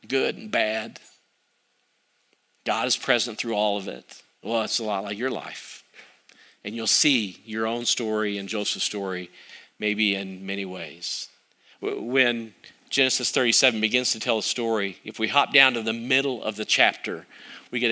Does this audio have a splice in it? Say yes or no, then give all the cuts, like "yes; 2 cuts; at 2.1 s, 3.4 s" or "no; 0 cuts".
no; 0 cuts